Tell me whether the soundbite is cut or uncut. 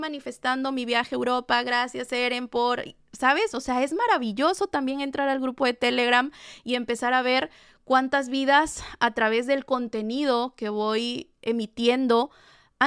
uncut